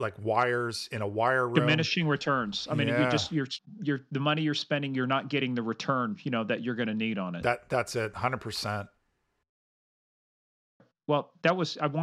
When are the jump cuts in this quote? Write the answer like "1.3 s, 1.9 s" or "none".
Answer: none

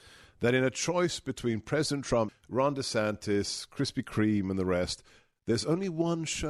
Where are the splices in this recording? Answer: 2.3 s

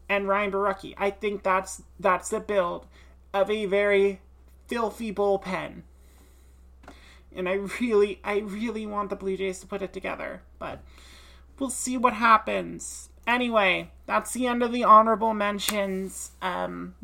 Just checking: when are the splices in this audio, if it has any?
none

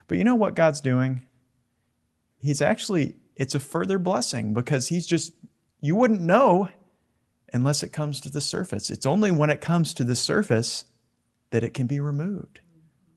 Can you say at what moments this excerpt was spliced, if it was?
none

